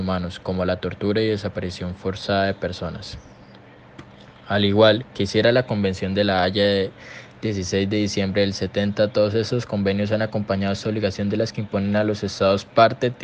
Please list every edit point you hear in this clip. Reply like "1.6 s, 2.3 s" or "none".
none